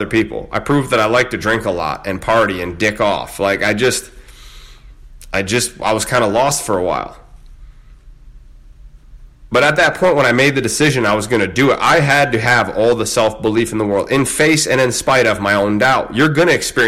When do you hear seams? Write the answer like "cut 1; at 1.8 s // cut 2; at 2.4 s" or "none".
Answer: none